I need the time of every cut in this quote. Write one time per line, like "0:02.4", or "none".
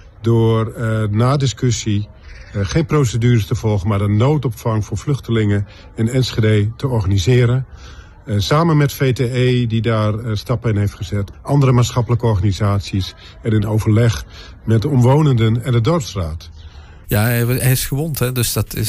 0:11.3
0:17.0